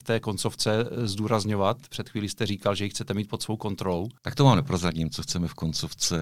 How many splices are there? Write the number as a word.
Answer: one